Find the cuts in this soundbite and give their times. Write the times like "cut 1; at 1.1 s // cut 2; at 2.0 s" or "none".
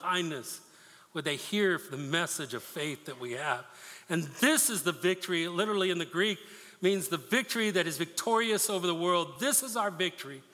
none